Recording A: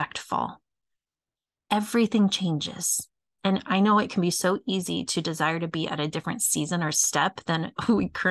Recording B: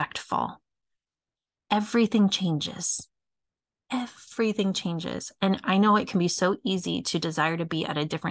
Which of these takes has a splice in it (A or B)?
A